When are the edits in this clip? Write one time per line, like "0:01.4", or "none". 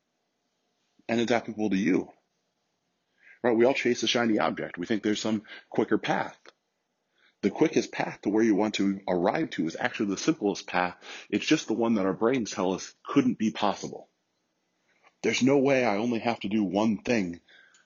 none